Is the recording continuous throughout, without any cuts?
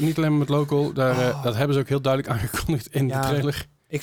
yes; 0 cuts

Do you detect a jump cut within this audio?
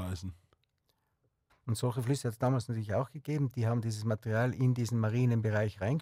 yes; 1 cut; at 1.5 s

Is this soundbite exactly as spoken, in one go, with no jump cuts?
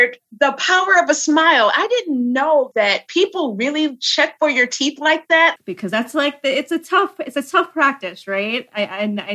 no; 2 cuts; at 2.7 s, 5.6 s

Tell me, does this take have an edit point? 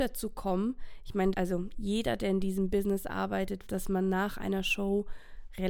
yes; 2 cuts; at 1.3 s, 3.7 s

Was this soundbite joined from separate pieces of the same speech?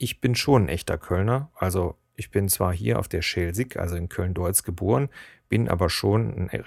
no; 0 cuts

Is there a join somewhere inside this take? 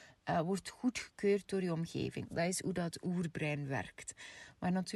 yes; 1 cut; at 2.2 s

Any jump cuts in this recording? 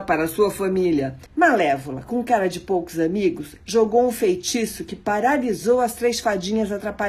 yes; 1 cut; at 1.3 s

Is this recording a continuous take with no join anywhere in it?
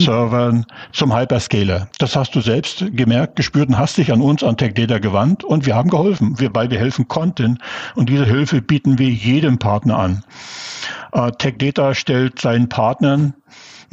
yes; 0 cuts

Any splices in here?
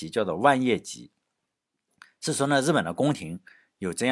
no; 0 cuts

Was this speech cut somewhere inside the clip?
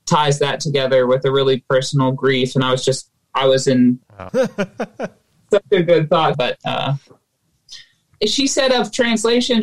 yes; 3 cuts; at 4.3 s, 6.3 s, 8.1 s

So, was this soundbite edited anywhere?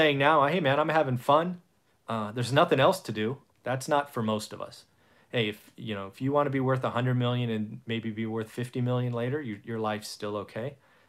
yes; 1 cut; at 3.6 s

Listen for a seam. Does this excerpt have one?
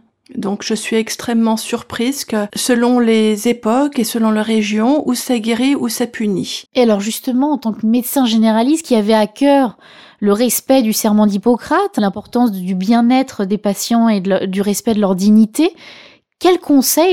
yes; 1 cut; at 6.7 s

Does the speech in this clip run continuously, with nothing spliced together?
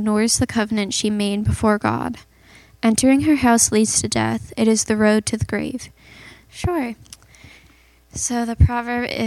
no; 1 cut; at 6.5 s

